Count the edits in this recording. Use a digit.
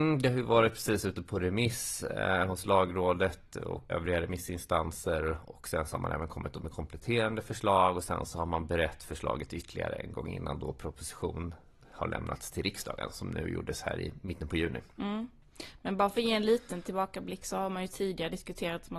1